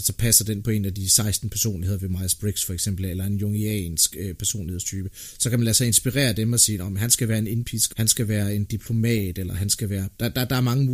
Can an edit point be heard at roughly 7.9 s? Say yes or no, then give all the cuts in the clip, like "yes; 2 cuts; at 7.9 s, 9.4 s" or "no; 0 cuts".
yes; 1 cut; at 7.9 s